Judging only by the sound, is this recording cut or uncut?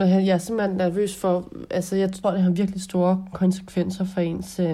cut